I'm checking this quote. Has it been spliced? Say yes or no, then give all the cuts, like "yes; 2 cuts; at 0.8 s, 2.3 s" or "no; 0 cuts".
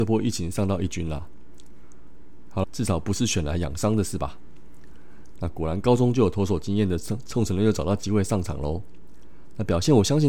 yes; 2 cuts; at 2.6 s, 5.4 s